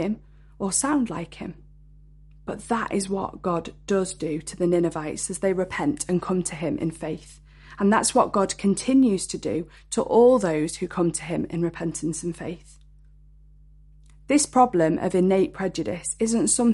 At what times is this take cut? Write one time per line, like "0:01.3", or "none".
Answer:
none